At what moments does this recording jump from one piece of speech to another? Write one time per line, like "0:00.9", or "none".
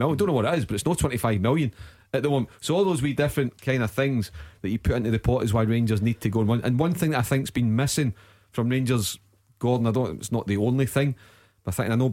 none